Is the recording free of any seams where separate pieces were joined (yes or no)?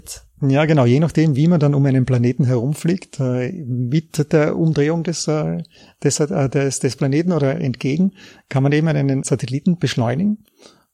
yes